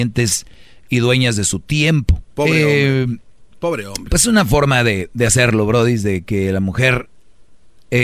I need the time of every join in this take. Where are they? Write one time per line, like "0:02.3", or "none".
0:02.3